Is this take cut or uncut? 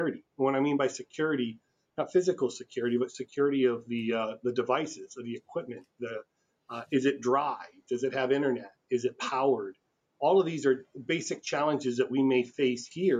uncut